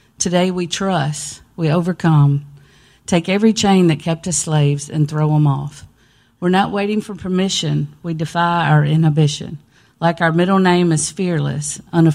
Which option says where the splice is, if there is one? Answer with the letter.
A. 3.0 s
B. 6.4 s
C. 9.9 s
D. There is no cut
D